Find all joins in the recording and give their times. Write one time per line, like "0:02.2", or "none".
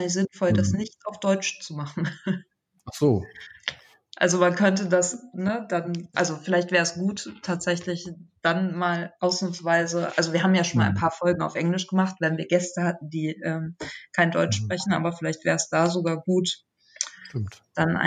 0:06.1